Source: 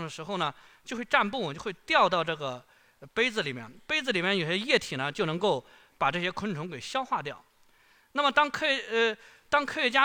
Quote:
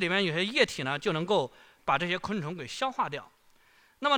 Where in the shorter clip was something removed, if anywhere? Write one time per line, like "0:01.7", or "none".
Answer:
none